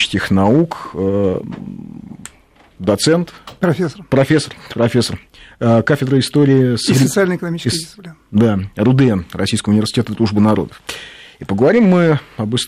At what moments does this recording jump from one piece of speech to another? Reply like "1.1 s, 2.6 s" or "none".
none